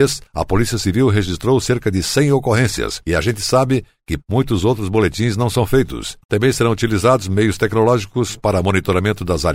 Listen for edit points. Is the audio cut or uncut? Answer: cut